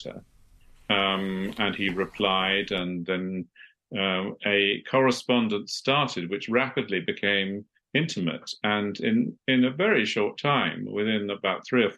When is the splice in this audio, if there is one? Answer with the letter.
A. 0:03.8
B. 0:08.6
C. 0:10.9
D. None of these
D